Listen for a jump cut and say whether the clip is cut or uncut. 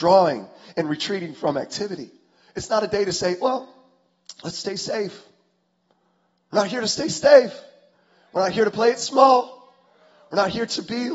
uncut